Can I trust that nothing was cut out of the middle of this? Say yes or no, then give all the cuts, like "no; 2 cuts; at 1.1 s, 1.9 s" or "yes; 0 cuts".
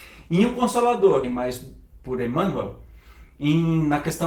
no; 1 cut; at 1.2 s